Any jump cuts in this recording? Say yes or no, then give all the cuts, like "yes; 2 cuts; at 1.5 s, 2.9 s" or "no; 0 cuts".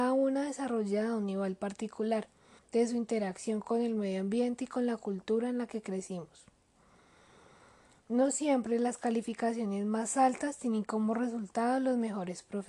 yes; 1 cut; at 2.6 s